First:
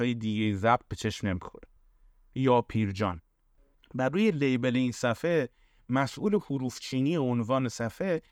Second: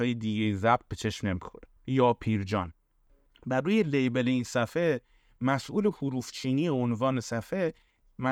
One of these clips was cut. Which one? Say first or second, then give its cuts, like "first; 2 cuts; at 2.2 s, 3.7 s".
second; 1 cut; at 1.8 s